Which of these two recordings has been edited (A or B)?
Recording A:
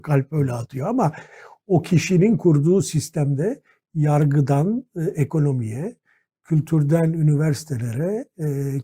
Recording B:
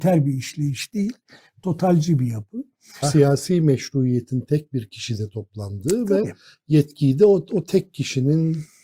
B